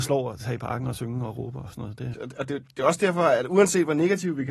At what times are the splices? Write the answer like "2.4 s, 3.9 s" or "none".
2.1 s